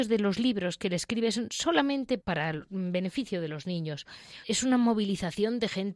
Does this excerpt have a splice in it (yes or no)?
yes